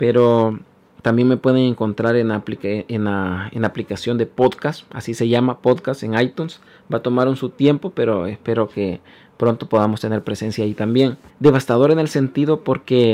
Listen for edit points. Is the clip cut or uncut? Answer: cut